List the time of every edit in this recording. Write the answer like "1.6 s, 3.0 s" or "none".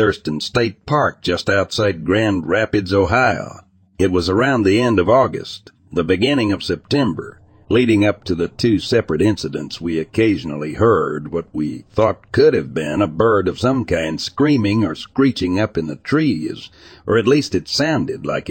7.6 s